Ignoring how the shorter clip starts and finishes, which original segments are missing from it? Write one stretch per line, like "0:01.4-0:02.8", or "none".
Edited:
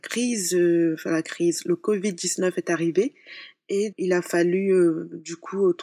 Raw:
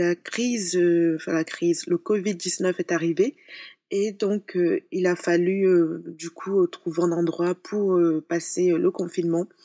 0:04.1-0:04.9